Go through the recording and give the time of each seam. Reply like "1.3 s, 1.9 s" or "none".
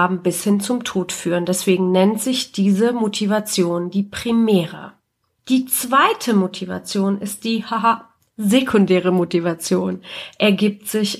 none

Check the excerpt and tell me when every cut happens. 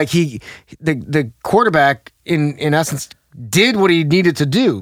none

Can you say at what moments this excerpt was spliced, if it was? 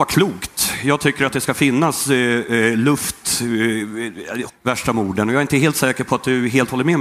4.5 s

